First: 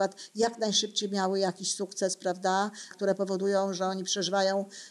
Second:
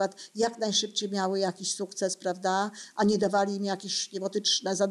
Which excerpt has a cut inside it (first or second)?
first